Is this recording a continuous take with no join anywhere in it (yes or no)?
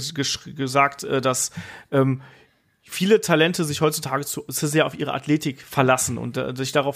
yes